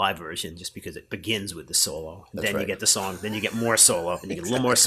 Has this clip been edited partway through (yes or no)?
no